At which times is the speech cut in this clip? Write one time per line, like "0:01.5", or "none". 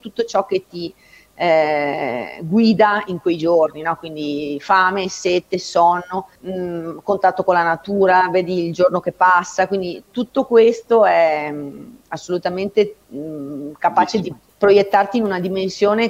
none